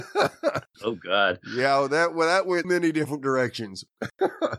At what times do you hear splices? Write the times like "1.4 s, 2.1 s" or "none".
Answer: 2.6 s